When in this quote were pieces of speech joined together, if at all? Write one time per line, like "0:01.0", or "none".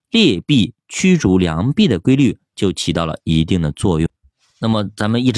none